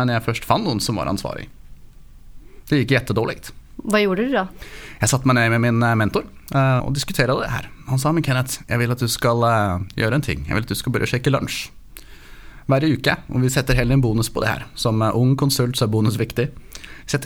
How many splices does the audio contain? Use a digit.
1